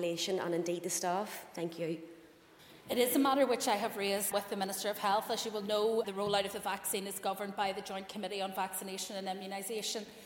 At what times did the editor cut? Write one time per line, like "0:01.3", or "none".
0:04.3
0:06.0